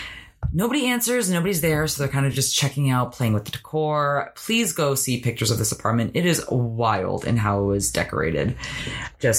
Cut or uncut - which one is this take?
uncut